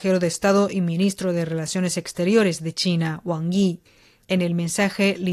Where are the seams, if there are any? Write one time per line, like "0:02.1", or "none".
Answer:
0:04.2